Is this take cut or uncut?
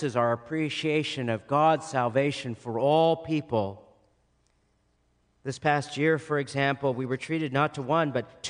uncut